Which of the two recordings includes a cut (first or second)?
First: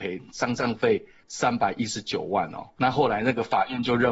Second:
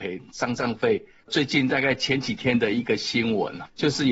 second